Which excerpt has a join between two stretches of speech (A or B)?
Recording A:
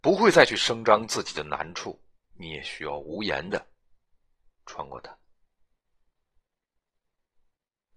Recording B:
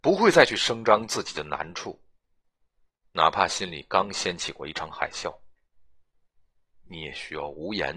A